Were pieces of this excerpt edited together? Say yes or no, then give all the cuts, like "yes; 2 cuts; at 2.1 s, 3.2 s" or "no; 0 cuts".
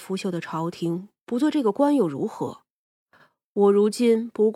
no; 0 cuts